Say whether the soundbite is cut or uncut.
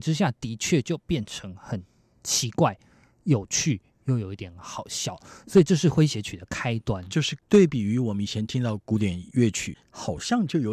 uncut